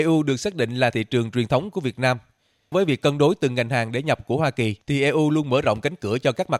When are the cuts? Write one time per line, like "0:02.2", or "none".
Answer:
0:02.7
0:04.8